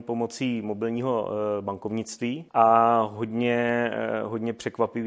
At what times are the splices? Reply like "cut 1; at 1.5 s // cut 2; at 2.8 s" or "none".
cut 1; at 2.5 s